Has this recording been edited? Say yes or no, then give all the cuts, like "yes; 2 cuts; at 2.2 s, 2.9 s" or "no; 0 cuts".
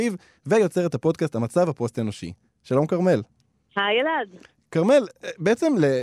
no; 0 cuts